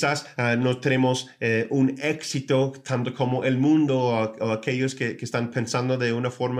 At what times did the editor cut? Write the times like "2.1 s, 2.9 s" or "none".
none